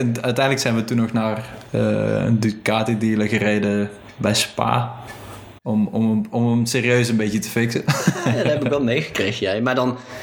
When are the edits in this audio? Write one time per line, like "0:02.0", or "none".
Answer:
0:05.6